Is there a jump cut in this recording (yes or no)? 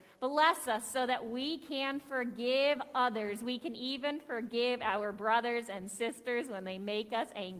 no